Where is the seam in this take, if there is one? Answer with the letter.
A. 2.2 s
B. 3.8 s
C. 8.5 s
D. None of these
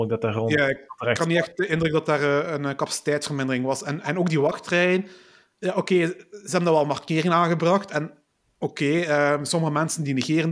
D